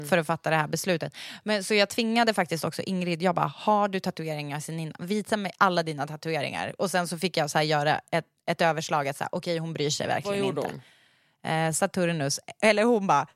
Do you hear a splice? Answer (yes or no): no